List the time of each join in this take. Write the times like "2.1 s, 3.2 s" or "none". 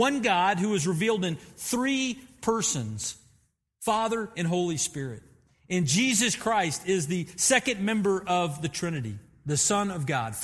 4.3 s

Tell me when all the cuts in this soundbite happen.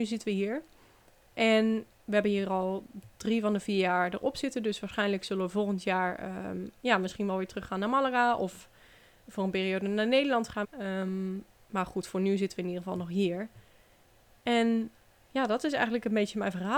10.6 s

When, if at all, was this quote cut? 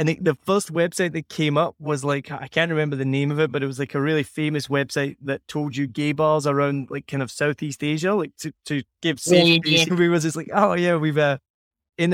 9.9 s

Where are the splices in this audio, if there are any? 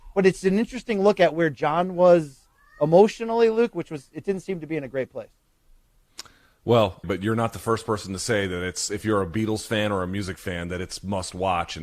7.0 s

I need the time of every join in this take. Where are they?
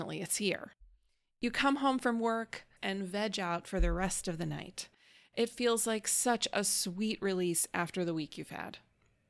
2.8 s

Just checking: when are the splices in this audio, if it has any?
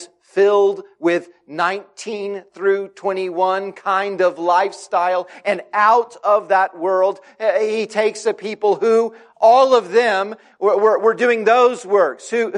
none

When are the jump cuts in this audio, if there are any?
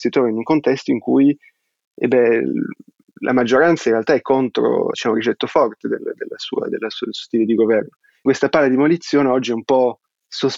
4.9 s, 8.3 s

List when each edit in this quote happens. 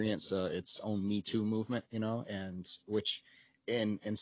1.9 s

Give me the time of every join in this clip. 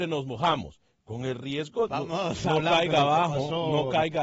1.9 s

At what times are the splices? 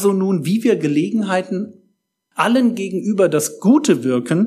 2.3 s

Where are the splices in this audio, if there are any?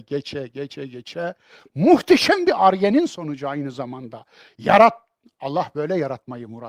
none

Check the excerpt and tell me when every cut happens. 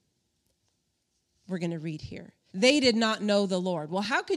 2.5 s

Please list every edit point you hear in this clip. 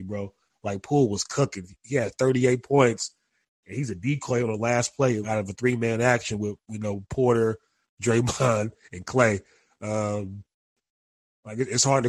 5.2 s

